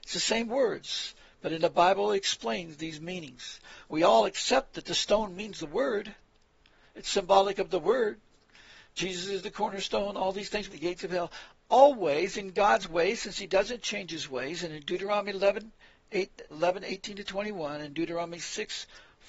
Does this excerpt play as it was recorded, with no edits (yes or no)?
no